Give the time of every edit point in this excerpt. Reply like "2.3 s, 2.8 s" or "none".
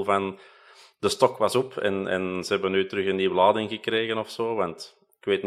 none